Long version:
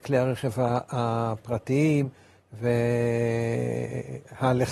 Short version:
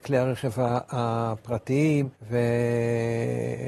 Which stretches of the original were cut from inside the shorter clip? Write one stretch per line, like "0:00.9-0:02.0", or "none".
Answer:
0:02.1-0:02.4